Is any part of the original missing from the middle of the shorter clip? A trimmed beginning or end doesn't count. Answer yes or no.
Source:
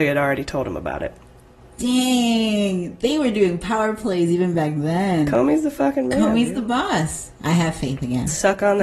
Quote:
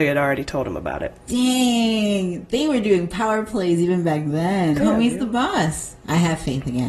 yes